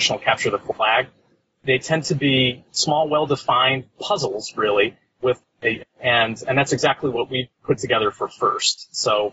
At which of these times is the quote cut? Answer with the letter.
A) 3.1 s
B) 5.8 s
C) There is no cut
B